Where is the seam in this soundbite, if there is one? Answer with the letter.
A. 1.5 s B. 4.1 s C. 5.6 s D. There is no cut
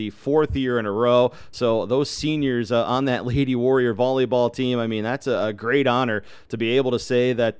D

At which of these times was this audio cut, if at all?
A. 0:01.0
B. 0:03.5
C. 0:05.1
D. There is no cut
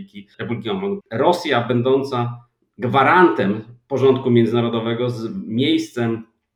A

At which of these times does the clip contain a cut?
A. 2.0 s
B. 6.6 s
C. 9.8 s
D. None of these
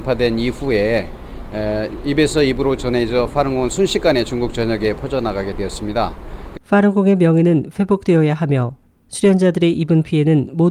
B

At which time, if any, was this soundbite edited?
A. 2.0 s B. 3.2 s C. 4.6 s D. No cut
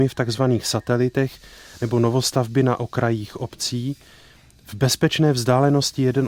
D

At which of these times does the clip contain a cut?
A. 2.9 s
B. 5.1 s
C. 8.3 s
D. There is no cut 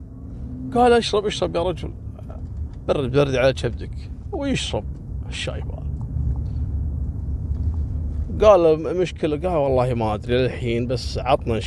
D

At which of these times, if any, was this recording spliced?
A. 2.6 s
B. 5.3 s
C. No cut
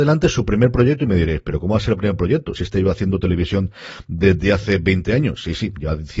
C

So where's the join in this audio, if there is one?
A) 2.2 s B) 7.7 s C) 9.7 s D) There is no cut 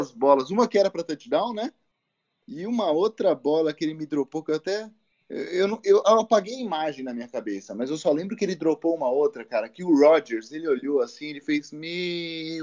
D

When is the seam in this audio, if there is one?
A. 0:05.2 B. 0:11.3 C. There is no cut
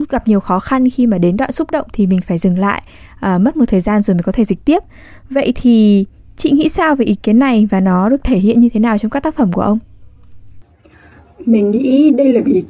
C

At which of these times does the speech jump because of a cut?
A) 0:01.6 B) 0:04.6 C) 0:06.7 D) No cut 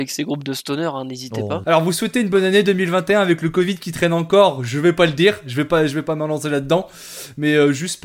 A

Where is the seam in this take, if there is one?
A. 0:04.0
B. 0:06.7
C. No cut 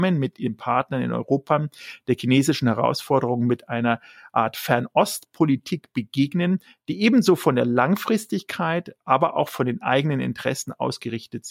C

